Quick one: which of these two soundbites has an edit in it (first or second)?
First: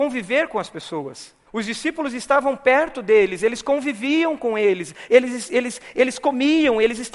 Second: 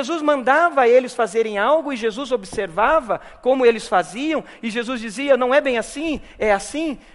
first